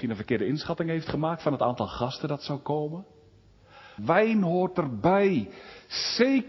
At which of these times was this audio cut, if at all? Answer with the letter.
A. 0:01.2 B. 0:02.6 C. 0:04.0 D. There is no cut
C